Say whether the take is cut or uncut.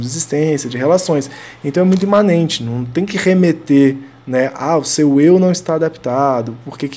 uncut